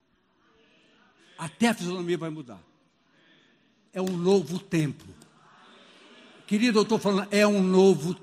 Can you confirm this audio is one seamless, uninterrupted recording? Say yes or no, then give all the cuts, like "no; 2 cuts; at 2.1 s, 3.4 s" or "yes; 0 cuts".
yes; 0 cuts